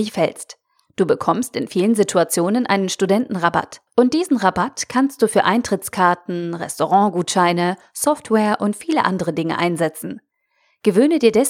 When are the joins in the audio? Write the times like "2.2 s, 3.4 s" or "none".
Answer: 3.9 s

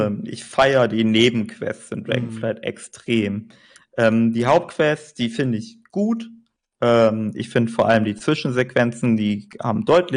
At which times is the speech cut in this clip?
none

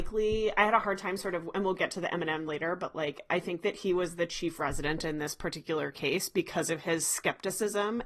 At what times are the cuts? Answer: none

